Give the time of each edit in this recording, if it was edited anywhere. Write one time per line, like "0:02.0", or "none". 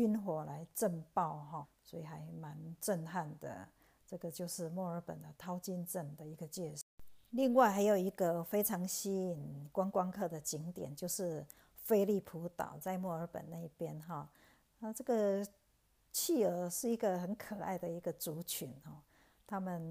0:01.6